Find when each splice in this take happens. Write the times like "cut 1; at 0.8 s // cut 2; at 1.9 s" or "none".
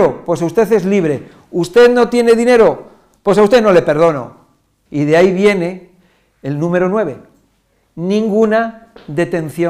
cut 1; at 4.9 s